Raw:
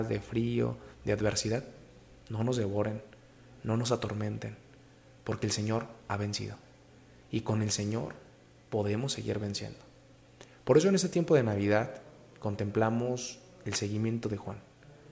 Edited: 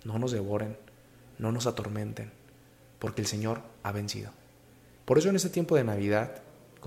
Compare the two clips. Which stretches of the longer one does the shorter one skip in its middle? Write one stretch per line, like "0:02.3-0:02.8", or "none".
0:07.3-0:10.6

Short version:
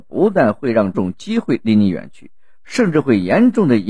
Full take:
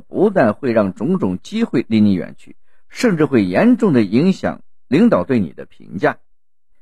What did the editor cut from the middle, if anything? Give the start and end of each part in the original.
0:00.9-0:01.2

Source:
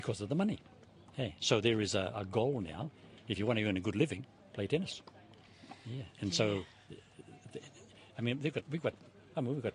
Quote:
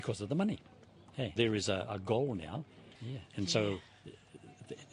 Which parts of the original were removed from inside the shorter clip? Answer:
0:01.4-0:01.6
0:03.2-0:05.8

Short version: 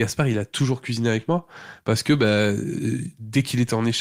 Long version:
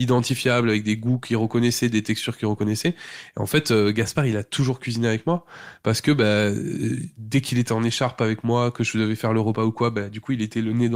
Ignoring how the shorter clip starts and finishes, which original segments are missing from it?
none

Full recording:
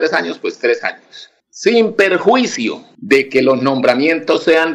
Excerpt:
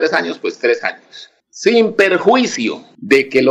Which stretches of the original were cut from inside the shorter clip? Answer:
none

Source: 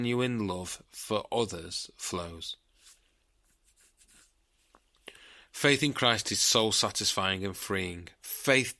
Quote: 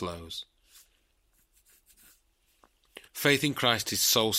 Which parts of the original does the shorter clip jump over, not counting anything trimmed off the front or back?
0:05.2-0:05.5

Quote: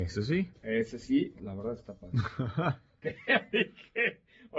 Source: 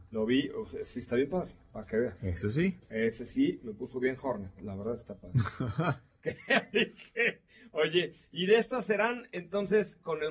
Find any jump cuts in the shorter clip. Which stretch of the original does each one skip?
0:03.6-0:04.5

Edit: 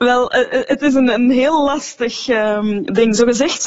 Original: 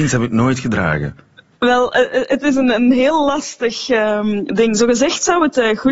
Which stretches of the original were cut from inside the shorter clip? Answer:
none

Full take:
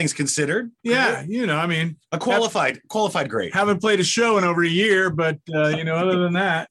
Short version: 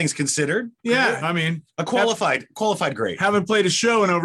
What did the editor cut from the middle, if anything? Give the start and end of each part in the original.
0:01.2-0:01.6

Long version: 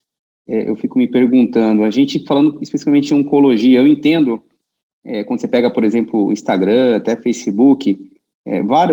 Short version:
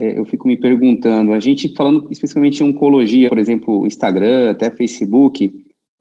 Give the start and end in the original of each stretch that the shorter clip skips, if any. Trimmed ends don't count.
0:03.8-0:05.7

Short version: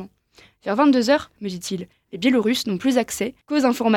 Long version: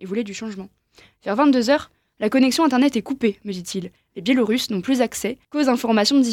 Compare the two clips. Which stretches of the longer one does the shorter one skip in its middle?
0:02.0-0:03.4

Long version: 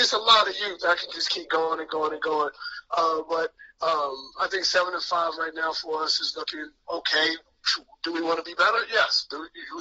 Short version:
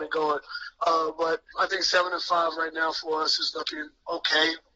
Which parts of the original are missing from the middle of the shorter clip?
0:03.6-0:04.3

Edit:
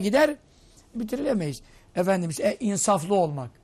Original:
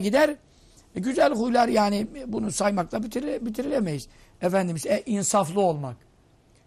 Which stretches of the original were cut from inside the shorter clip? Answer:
0:00.9-0:03.4

